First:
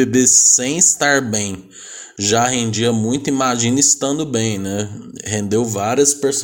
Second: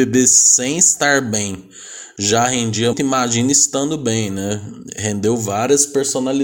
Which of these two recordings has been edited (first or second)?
second